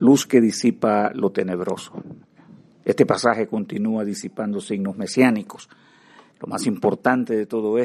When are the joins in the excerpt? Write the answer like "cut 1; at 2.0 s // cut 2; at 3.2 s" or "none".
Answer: cut 1; at 6.3 s